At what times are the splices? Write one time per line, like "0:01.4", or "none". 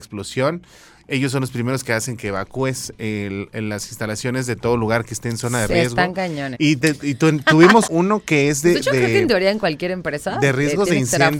0:06.5
0:07.9

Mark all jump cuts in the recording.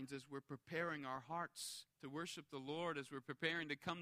0:01.9

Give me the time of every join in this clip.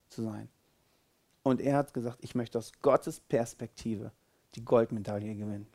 none

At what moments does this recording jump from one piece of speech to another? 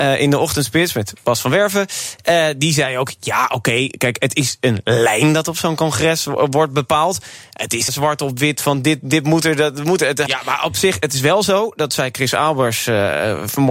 0:07.9
0:10.3

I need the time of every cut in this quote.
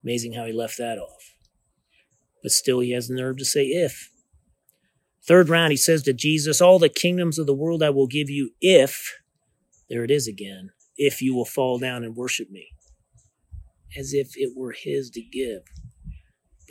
none

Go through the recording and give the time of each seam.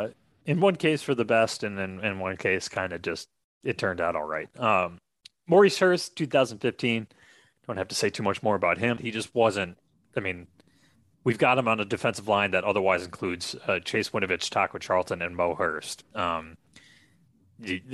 0:09.0

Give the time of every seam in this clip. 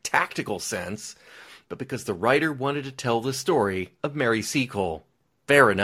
0:01.6
0:04.0

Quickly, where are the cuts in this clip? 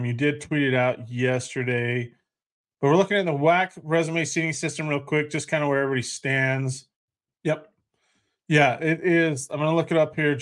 0:07.3

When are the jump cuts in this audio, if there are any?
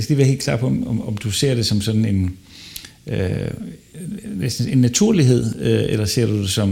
none

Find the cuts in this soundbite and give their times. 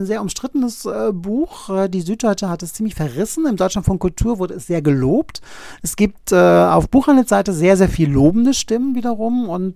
none

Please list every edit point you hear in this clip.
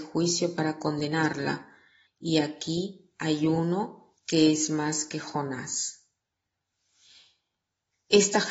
0:02.1

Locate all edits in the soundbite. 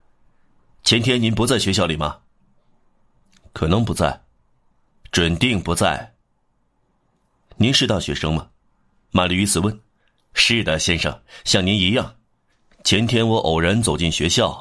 none

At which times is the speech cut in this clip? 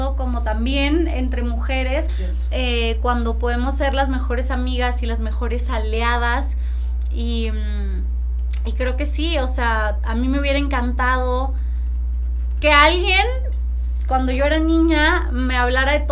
0:02.1
0:12.6

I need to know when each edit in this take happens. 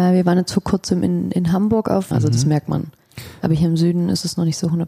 0:02.1

